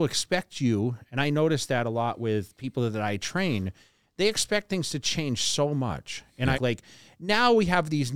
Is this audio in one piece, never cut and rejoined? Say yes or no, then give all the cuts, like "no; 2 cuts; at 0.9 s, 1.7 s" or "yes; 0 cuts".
no; 1 cut; at 6.5 s